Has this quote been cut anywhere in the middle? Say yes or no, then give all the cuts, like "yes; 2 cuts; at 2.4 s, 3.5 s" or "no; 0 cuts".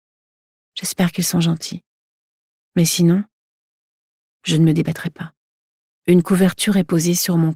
yes; 1 cut; at 5.9 s